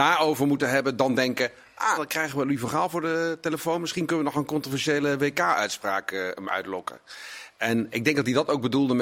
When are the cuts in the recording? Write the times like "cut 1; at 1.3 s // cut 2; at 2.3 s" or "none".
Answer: cut 1; at 2.0 s